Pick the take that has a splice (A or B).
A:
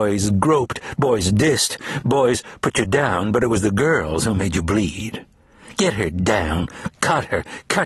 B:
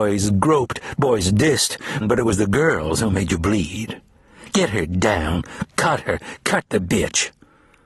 B